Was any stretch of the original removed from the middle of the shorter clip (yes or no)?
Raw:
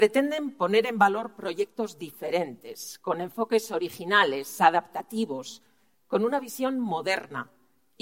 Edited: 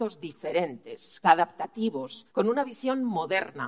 yes